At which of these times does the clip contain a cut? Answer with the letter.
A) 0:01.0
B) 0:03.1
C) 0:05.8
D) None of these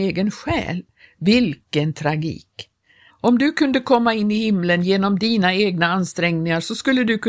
B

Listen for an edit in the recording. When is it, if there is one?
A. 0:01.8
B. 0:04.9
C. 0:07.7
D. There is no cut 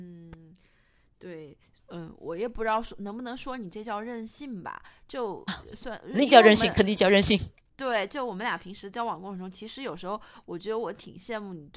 A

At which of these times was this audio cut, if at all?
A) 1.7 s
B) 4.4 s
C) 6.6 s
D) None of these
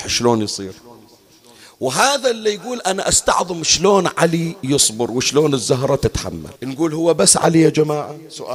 C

